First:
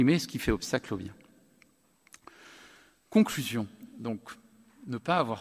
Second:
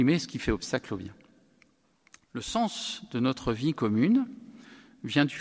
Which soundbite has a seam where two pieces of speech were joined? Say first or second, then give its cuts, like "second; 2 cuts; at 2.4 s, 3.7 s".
second; 1 cut; at 2.2 s